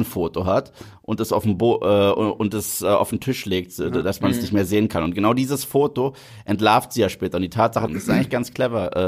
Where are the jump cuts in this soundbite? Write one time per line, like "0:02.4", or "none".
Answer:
0:07.9